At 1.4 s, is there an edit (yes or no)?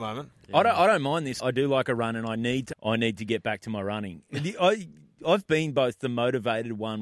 yes